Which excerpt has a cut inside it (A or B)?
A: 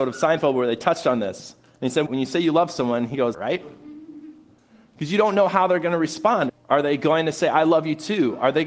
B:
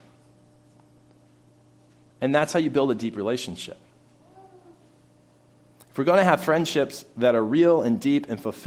A